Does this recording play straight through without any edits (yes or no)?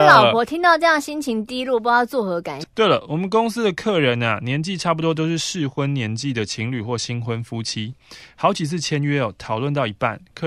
no